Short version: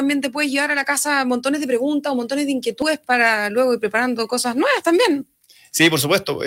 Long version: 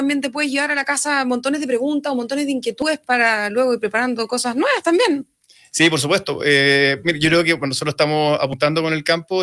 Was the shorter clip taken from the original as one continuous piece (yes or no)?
yes